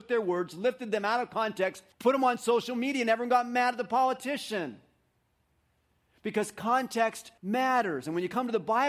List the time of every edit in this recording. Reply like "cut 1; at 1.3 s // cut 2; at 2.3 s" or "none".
cut 1; at 1.9 s // cut 2; at 7.4 s